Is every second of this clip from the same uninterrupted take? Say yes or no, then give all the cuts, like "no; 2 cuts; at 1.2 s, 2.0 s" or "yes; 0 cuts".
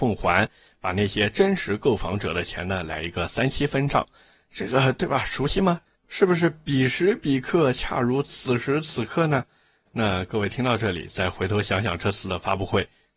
yes; 0 cuts